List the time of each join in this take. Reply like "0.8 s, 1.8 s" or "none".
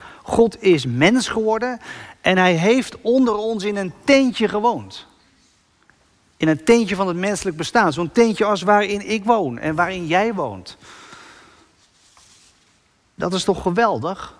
none